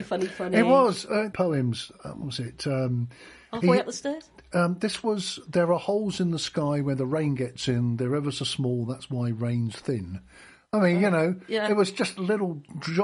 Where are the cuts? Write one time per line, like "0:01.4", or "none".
0:01.3